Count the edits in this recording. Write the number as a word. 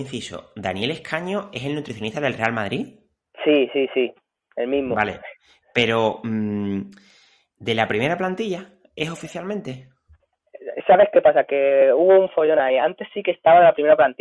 zero